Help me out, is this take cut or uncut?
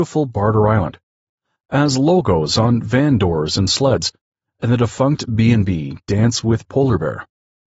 uncut